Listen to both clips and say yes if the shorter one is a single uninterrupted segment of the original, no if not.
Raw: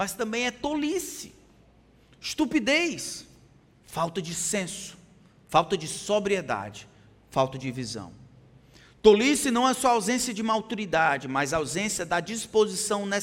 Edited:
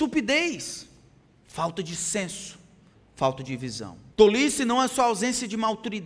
no